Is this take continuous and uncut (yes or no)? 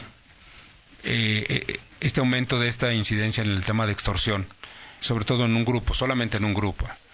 no